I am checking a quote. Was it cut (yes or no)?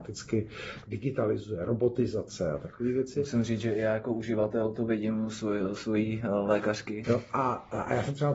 yes